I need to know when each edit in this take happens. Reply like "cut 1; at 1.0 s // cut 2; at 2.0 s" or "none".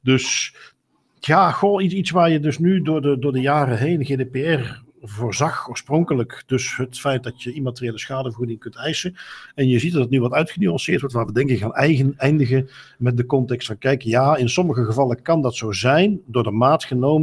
none